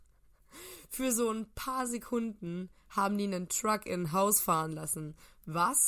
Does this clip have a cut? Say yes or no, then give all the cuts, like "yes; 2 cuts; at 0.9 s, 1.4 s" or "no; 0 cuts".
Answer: no; 0 cuts